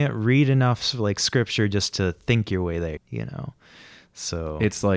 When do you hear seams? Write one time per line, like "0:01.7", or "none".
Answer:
0:03.0